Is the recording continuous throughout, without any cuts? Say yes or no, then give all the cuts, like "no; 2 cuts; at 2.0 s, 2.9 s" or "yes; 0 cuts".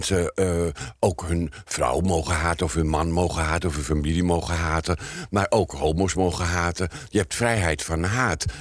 yes; 0 cuts